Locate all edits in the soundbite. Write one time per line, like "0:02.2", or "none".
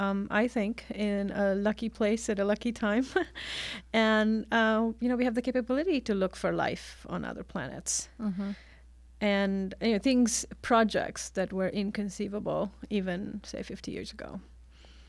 none